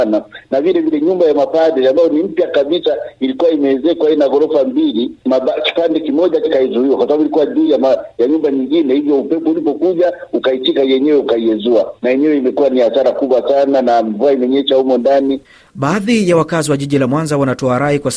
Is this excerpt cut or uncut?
uncut